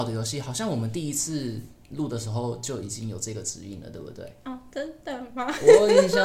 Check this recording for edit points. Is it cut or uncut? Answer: uncut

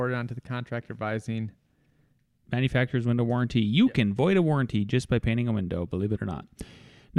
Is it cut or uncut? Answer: uncut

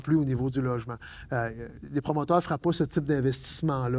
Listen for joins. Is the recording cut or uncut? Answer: uncut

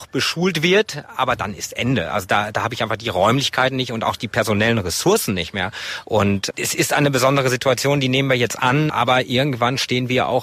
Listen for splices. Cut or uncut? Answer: uncut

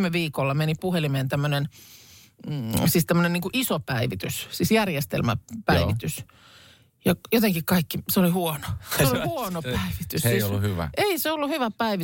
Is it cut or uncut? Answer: uncut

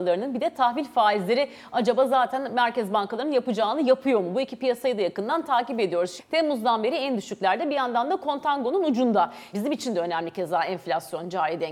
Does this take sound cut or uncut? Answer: cut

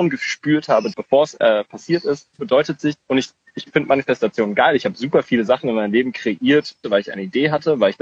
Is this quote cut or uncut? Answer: cut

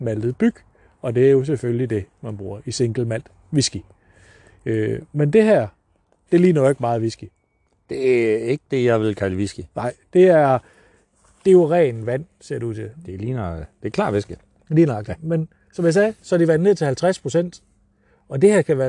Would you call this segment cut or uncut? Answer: uncut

